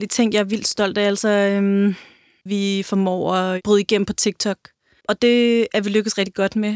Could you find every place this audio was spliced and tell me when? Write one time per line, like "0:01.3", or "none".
0:02.5
0:05.0